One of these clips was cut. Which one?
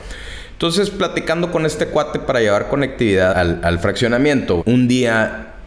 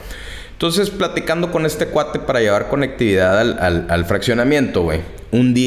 first; 2 cuts; at 3.3 s, 4.6 s

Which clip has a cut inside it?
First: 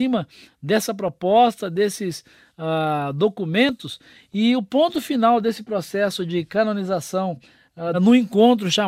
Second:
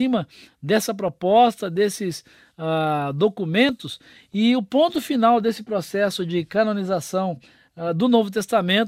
first; 1 cut; at 7.9 s

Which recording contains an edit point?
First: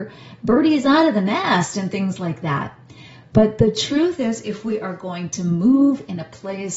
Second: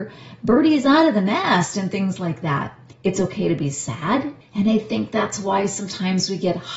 second; 2 cuts; at 2.9 s, 4.4 s

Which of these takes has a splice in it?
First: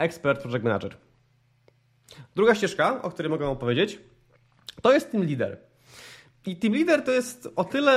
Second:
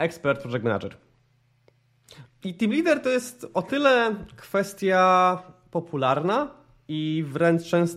second; 1 cut; at 2.3 s

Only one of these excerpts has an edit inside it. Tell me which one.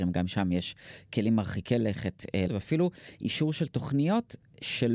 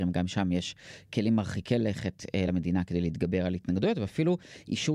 first; 1 cut; at 2.5 s

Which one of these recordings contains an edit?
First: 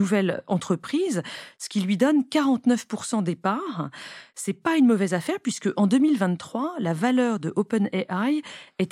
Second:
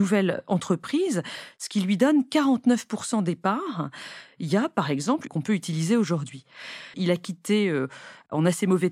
second; 3 cuts; at 4.3 s, 5.3 s, 6.9 s

